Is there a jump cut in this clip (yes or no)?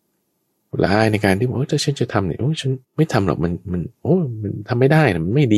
yes